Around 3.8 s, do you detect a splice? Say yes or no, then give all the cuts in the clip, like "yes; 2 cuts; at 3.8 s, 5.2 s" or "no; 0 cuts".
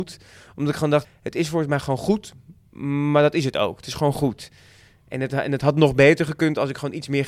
no; 1 cut; at 1.0 s